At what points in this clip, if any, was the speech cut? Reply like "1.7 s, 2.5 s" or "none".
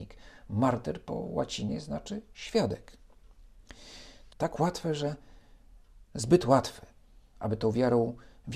4.3 s, 7.4 s